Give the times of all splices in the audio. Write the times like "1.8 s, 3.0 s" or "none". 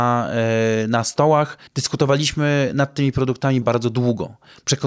1.7 s, 3.6 s